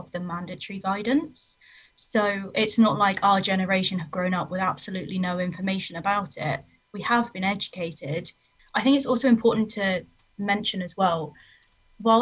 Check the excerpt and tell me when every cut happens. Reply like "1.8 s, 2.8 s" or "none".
8.6 s